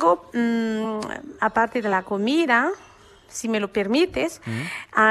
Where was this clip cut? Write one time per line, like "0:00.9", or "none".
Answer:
none